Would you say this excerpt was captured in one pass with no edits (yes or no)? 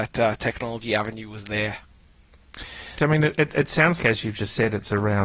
no